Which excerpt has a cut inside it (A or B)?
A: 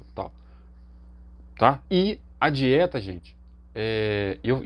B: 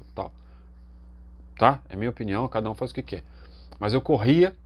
A